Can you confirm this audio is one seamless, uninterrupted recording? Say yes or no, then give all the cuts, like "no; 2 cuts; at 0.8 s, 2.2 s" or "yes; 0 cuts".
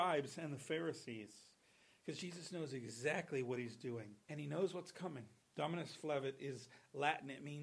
no; 2 cuts; at 4.2 s, 5.4 s